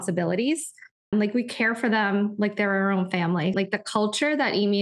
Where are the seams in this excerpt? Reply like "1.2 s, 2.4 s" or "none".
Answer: 1.1 s, 3.5 s